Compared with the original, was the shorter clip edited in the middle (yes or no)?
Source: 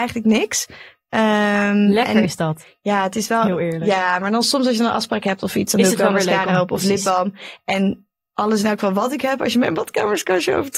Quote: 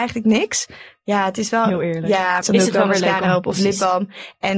yes